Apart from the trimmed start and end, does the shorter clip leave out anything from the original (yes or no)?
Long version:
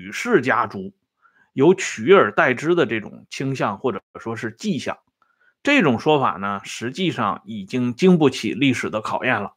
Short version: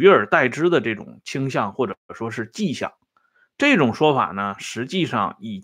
no